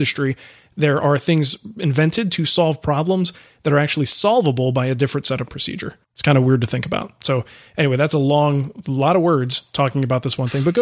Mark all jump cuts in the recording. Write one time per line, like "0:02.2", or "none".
0:06.0